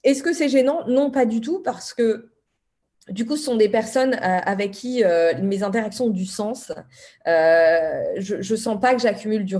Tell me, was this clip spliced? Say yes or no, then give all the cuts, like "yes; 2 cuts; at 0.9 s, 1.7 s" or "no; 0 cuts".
no; 0 cuts